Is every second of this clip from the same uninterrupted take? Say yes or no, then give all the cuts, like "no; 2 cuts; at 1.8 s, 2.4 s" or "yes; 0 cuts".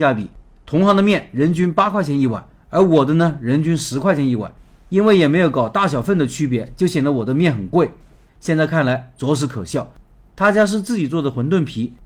no; 1 cut; at 8.3 s